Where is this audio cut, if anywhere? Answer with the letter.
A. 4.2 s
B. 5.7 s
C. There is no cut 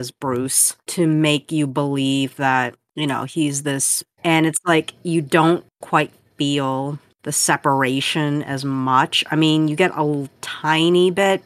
A